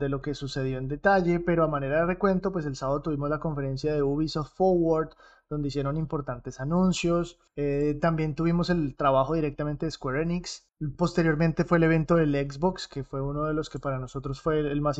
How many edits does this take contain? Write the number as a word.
zero